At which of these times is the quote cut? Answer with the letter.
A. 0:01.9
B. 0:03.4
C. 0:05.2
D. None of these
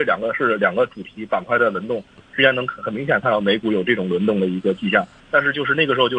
C